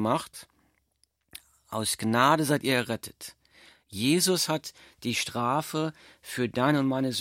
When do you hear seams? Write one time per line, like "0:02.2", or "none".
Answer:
none